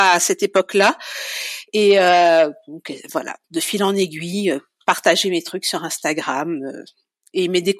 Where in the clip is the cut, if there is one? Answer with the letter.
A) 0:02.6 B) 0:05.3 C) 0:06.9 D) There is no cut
D